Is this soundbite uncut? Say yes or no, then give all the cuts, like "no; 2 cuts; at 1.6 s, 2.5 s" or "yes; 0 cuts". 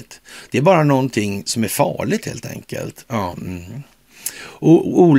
no; 1 cut; at 3.3 s